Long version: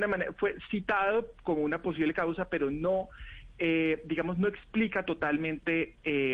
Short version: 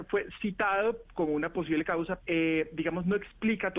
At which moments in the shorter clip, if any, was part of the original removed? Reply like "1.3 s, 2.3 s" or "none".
2.2 s